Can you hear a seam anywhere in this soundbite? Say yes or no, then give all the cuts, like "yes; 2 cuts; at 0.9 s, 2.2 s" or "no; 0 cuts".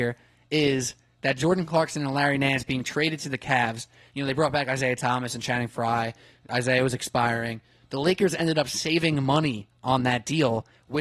no; 0 cuts